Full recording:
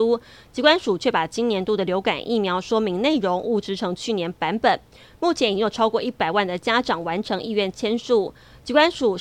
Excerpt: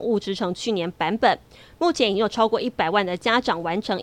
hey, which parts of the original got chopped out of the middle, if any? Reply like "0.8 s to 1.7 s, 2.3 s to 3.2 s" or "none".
none